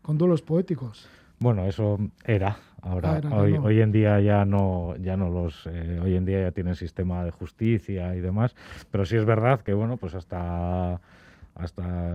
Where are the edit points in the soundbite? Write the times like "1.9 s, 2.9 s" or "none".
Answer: none